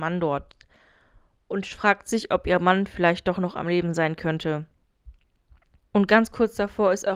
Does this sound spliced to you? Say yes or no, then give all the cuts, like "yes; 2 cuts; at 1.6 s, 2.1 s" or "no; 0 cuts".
yes; 1 cut; at 5.8 s